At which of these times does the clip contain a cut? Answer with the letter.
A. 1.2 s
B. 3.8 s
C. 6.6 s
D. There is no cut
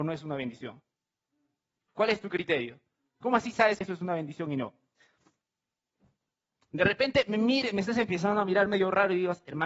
B